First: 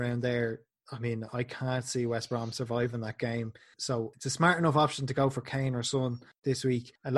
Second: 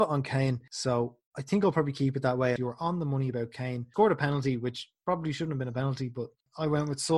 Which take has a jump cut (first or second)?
second